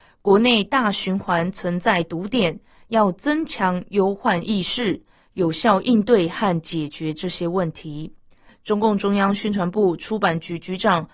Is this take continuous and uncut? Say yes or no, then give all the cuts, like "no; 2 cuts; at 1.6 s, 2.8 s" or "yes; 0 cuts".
no; 1 cut; at 8.5 s